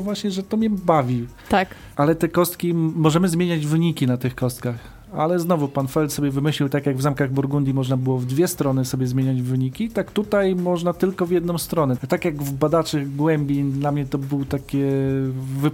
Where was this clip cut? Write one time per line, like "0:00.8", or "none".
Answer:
0:01.9
0:12.0